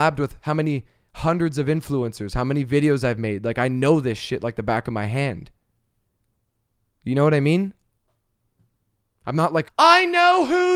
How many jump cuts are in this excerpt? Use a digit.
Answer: 1